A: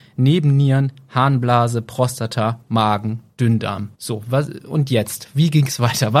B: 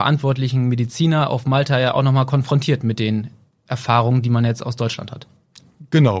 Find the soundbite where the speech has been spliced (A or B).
A